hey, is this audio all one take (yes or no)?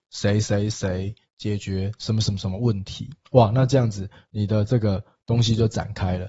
no